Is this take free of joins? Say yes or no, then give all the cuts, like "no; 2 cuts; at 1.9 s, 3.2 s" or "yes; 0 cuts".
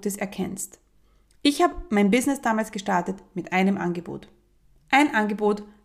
yes; 0 cuts